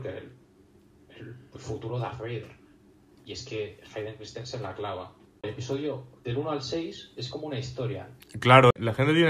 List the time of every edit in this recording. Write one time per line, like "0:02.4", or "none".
0:05.4
0:08.2